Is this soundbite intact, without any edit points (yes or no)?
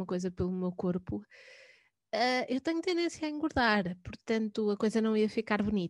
yes